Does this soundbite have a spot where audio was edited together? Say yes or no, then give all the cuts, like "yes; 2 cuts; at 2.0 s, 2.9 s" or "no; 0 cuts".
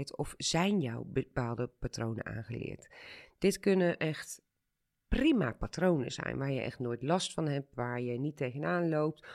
no; 0 cuts